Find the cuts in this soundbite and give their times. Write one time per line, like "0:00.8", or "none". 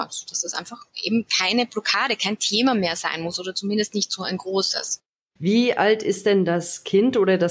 0:05.4